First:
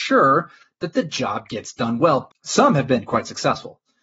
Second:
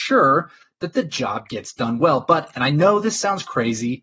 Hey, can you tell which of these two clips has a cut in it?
first; 1 cut; at 2.3 s

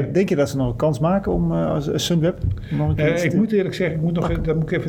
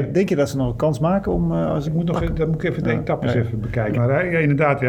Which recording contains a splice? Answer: second; 2 cuts; at 1.9 s, 3.9 s

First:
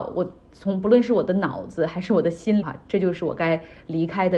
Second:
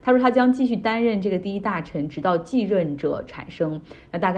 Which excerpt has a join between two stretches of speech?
first; 1 cut; at 2.6 s

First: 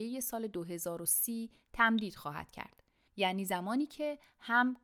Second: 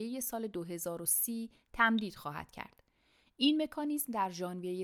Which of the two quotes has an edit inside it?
first; 1 cut; at 3.1 s

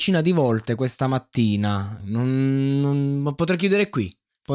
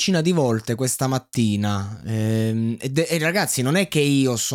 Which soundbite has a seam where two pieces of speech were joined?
first; 1 cut; at 2.0 s

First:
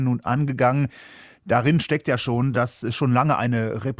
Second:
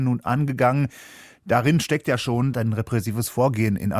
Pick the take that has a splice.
second; 1 cut; at 2.5 s

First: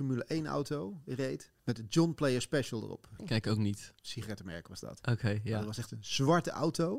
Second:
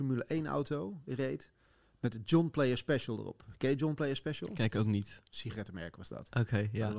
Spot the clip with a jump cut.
first; 2 cuts; at 1.6 s, 3.2 s

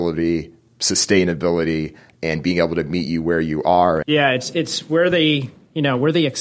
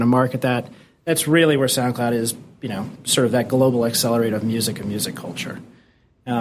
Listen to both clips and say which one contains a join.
first; 1 cut; at 4.0 s

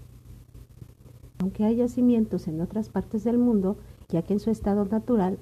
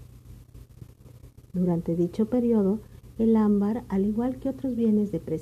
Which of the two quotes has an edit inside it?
first; 2 cuts; at 1.3 s, 4.1 s

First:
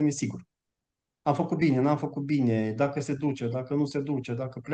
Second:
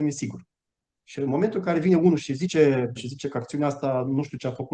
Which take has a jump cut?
second; 2 cuts; at 0.9 s, 3.0 s

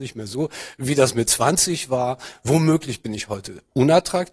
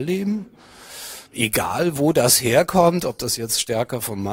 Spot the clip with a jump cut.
second; 1 cut; at 1.3 s

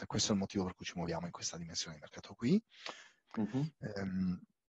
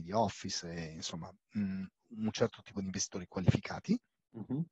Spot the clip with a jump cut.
first; 1 cut; at 3.3 s

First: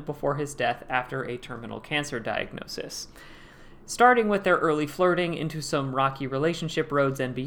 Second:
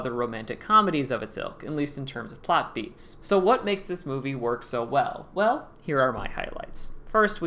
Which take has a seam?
second; 1 cut; at 3.2 s

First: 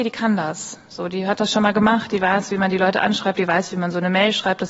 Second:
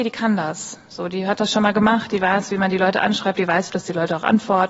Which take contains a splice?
second; 1 cut; at 3.7 s

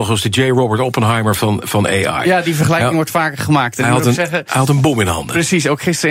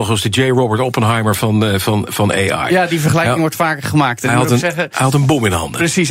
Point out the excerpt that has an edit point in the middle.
first; 1 cut; at 1.4 s

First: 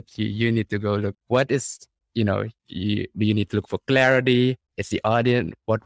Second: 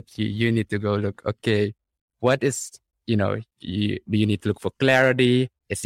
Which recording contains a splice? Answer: first; 1 cut; at 1.1 s

